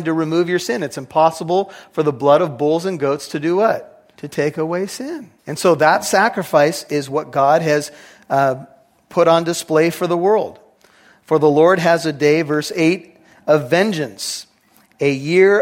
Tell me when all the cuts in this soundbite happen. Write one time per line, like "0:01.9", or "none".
0:04.1
0:05.4